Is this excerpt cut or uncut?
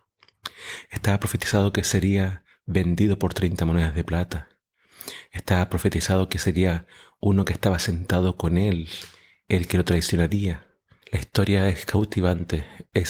cut